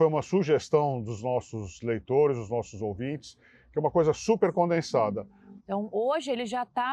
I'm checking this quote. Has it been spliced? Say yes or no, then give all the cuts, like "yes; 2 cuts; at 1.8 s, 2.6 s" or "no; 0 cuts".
yes; 1 cut; at 5.6 s